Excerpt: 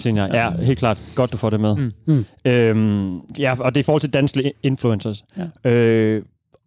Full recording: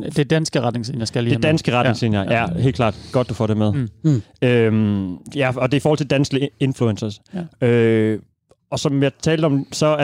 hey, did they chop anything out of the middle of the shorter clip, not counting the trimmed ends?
no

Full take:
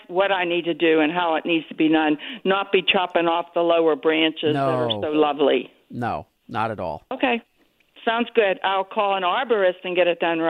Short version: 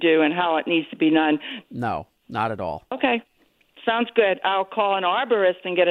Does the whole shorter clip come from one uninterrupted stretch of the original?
no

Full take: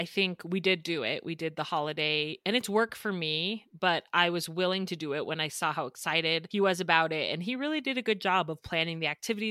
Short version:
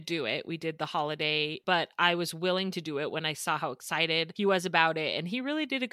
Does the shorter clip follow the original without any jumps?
no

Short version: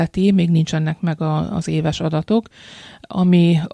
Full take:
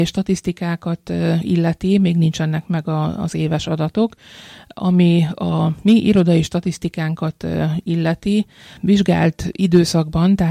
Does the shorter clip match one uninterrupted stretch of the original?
yes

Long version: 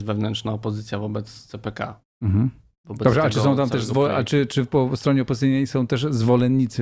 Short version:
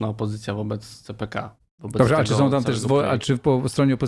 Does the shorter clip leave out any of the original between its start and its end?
yes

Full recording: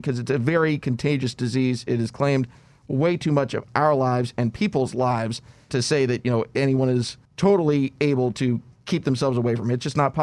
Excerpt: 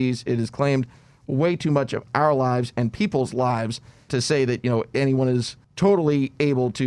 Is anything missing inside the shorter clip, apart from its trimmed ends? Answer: no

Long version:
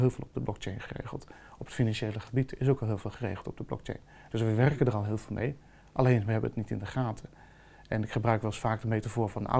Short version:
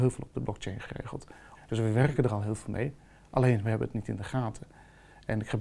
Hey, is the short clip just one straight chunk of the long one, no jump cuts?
no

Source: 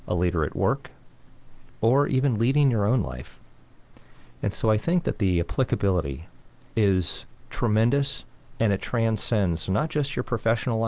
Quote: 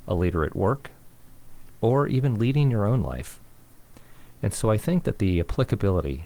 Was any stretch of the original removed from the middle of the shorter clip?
no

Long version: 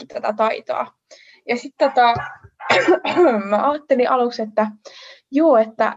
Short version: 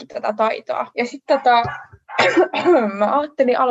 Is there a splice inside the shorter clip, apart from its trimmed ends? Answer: yes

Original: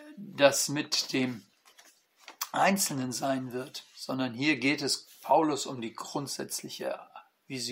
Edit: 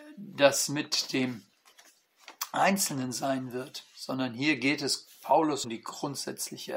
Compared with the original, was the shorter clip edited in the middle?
yes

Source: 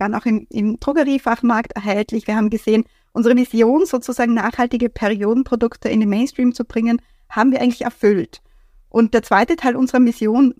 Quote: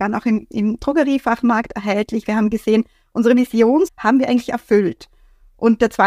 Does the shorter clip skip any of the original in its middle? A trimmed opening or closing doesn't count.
yes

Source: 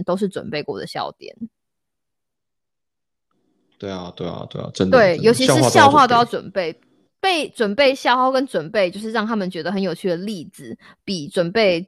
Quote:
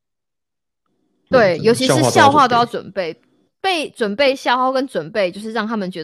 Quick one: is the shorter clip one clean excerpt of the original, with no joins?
no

